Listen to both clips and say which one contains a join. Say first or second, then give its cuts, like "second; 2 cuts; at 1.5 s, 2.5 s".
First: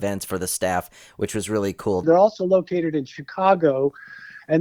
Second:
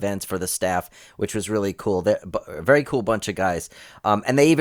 first; 1 cut; at 2.0 s